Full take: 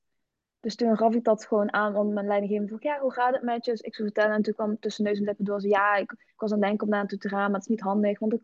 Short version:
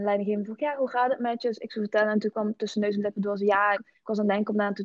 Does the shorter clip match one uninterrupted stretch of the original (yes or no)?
no